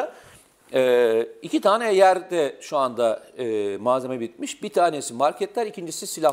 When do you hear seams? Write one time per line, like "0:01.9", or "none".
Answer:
none